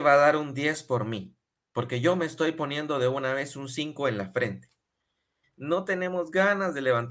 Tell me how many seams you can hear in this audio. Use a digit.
1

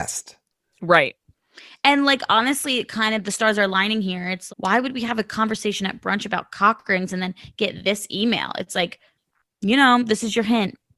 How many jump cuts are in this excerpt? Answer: 1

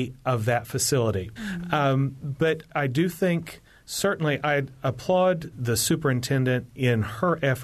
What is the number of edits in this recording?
3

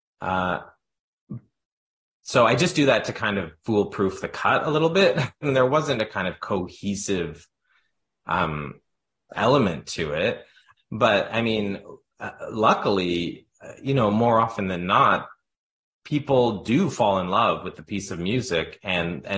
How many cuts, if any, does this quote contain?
2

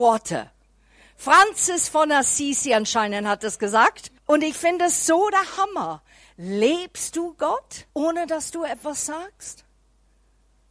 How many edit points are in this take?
2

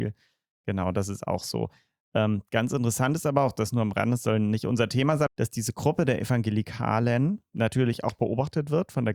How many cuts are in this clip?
1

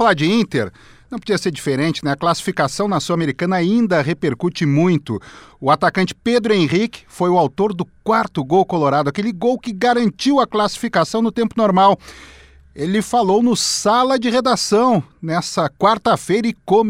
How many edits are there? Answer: 0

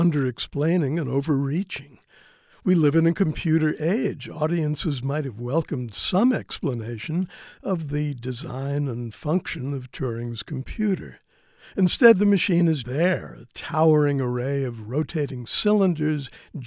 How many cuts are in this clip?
1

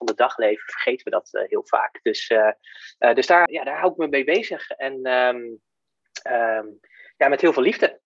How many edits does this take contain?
1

